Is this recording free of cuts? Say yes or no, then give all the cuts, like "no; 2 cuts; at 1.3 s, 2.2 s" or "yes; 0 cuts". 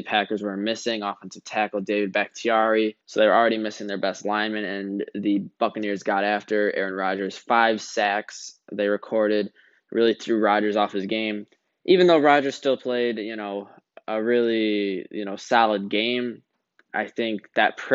no; 1 cut; at 3.0 s